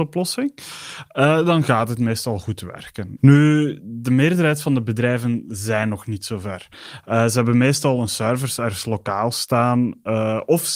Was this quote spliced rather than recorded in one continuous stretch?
yes; 1 cut; at 3.2 s

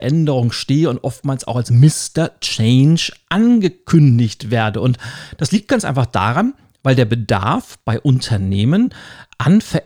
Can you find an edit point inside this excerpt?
no; 0 cuts

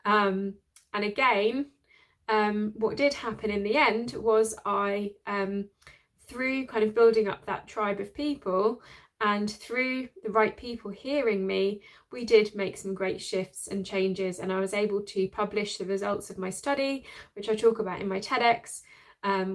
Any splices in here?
no; 0 cuts

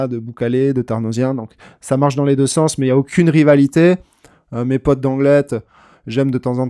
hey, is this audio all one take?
yes; 0 cuts

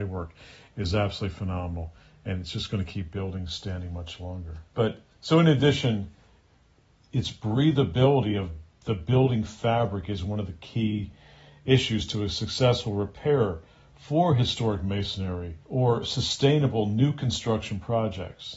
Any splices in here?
yes; 2 cuts; at 4.7 s, 15.6 s

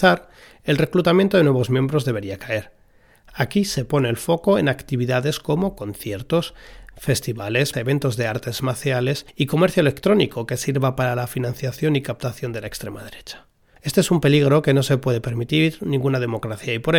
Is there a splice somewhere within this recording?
yes; 2 cuts; at 7.7 s, 13.7 s

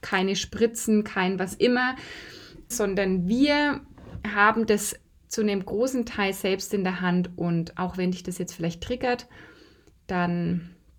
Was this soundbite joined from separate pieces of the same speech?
yes; 1 cut; at 2.7 s

